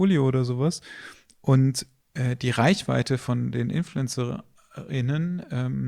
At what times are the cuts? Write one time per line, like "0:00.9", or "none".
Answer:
none